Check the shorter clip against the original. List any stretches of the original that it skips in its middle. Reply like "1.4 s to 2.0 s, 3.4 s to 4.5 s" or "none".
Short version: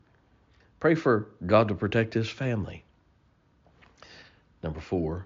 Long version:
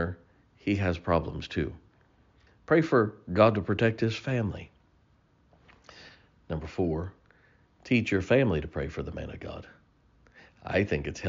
none

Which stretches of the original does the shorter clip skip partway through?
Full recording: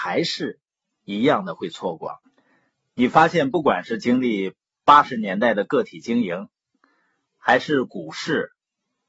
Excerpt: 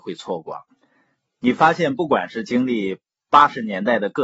none

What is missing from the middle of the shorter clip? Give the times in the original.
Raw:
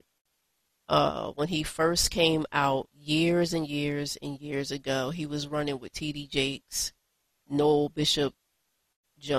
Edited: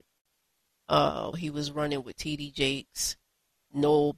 1.3 s to 5.1 s

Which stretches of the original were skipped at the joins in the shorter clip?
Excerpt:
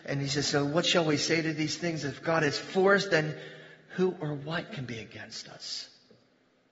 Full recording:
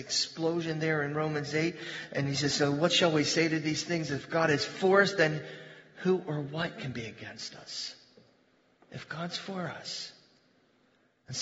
none

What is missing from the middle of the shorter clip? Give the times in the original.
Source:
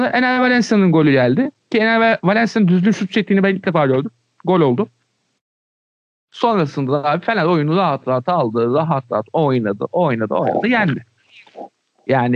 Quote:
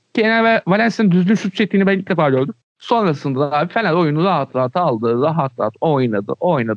4.2 s to 6.1 s

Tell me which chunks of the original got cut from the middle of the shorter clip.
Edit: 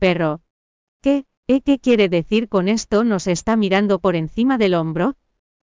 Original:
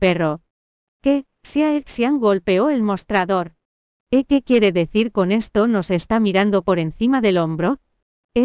1.4 s to 4.0 s

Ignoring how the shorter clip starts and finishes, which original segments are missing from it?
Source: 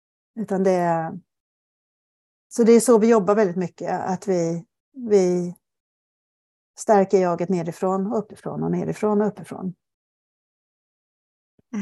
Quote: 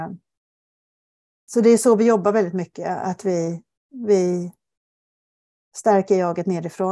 none

